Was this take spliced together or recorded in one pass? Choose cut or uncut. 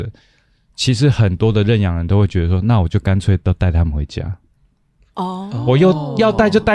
uncut